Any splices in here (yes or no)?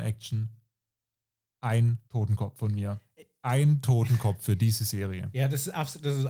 yes